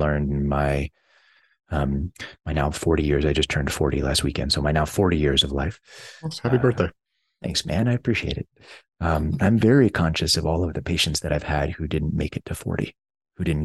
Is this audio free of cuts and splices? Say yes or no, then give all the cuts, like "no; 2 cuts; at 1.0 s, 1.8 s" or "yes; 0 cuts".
yes; 0 cuts